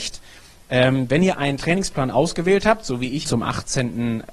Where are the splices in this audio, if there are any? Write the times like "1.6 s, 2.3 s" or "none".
3.2 s